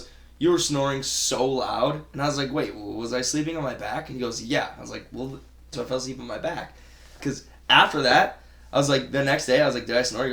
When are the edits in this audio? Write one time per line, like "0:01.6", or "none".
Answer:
0:05.7
0:07.2